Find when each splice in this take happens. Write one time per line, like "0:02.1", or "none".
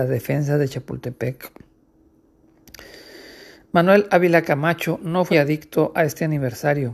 0:05.3